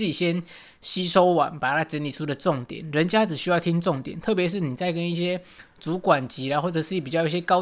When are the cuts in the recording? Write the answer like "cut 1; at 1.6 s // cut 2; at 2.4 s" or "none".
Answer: none